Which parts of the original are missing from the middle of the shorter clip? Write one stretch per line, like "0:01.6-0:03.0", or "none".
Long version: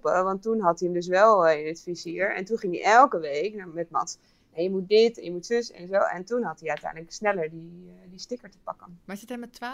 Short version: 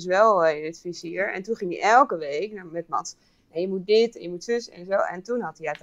none